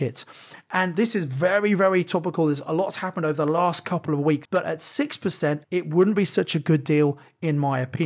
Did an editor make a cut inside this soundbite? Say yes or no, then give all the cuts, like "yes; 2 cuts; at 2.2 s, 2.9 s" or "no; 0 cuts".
yes; 2 cuts; at 4.4 s, 5.6 s